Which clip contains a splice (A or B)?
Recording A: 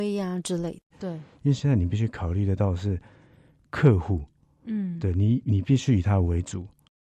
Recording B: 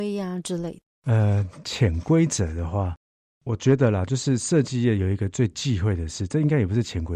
A